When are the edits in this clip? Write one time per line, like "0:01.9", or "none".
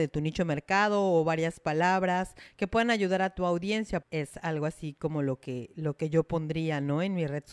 0:04.0

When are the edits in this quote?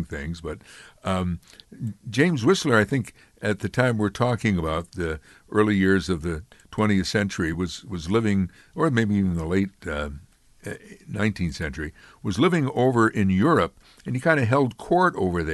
none

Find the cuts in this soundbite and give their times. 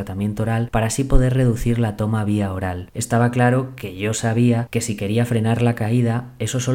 0:02.9

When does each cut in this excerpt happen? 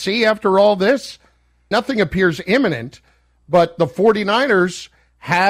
0:01.7

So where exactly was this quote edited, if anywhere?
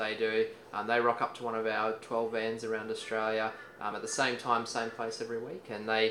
none

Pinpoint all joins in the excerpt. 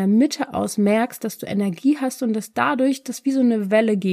none

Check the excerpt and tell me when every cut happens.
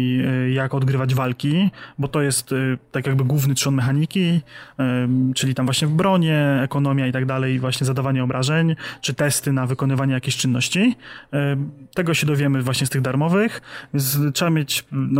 0:13.9

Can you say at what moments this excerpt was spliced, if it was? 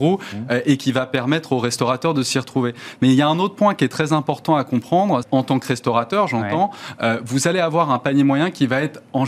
0:05.2

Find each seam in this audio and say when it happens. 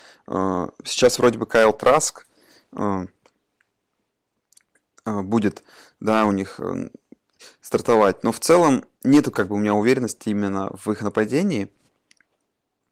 0:08.9

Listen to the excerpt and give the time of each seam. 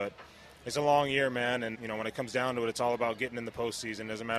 0:01.7

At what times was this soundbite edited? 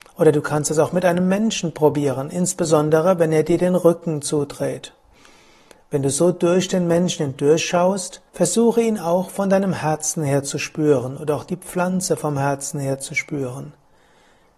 0:08.3

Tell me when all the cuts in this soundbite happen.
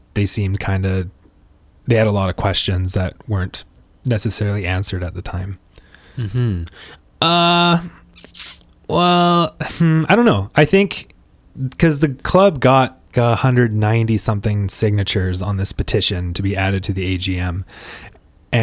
0:07.0
0:11.5
0:13.1

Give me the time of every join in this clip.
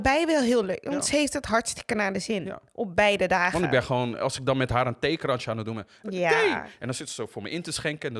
0:06.0

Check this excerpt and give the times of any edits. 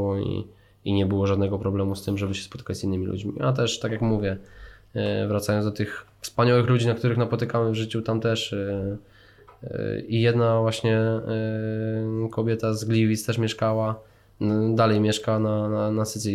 none

